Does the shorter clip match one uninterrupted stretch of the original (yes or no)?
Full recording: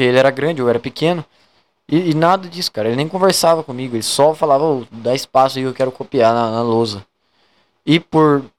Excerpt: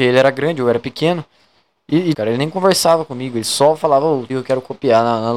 no